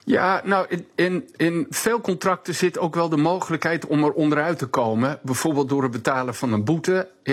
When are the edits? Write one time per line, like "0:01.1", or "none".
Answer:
none